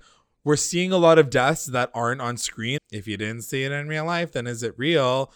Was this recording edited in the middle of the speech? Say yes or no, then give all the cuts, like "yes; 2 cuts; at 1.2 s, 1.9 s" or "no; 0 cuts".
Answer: yes; 1 cut; at 2.8 s